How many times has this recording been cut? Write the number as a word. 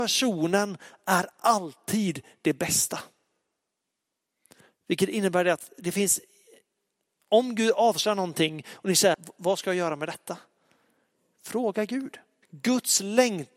one